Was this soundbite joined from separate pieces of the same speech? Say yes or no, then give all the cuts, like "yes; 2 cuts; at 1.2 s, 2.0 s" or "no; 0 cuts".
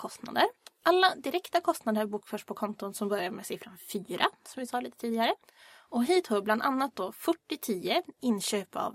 no; 0 cuts